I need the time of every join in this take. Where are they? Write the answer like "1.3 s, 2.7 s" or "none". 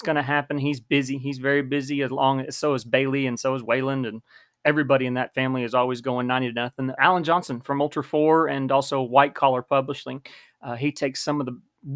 7.0 s